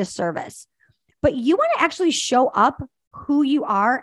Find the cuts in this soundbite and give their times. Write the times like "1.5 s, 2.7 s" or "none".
none